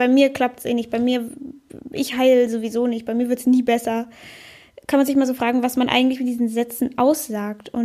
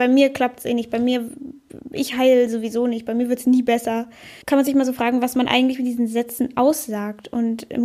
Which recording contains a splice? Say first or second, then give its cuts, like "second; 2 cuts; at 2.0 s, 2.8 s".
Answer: second; 1 cut; at 4.4 s